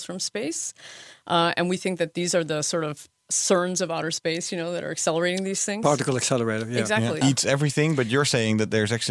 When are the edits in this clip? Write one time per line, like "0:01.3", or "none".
0:07.2